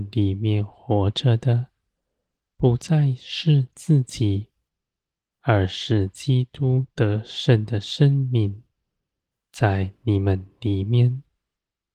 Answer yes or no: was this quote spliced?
no